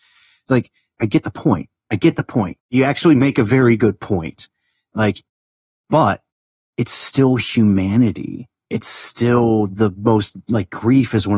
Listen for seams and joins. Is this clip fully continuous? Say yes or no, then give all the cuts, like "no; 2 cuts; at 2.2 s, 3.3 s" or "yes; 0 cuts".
yes; 0 cuts